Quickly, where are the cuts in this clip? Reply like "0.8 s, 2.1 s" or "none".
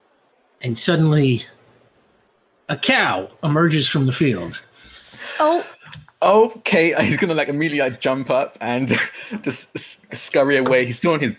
6.9 s, 10.1 s